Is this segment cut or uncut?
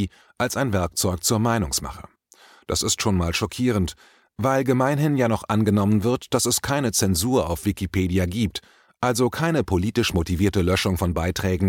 uncut